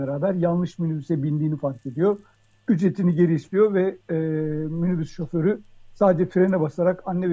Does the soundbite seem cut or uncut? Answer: uncut